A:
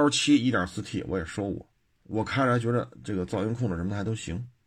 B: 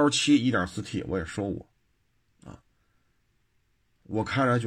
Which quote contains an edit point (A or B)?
A